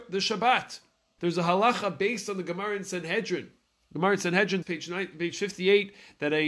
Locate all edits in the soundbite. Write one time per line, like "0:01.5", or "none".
0:01.2
0:04.6